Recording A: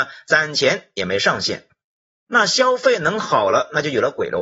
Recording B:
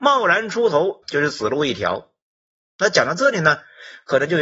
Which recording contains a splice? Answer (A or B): B